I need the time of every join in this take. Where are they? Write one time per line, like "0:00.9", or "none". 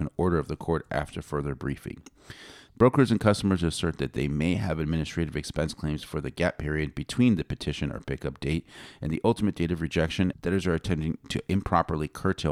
0:02.7
0:10.3